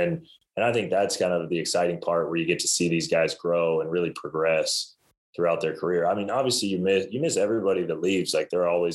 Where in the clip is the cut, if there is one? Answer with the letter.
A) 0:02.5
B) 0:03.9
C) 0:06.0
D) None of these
D